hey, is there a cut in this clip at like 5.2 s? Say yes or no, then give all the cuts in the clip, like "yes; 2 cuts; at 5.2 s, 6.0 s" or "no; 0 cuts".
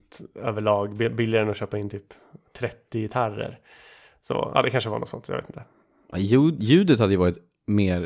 no; 0 cuts